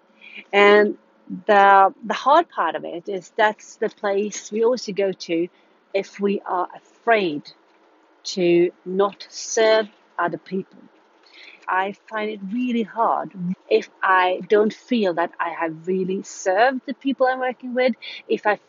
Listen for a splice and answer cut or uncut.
cut